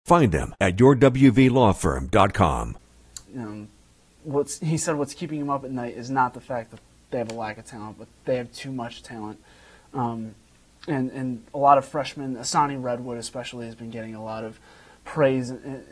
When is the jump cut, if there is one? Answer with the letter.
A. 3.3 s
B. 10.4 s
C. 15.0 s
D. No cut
A